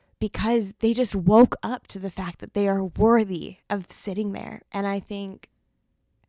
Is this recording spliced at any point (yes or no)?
yes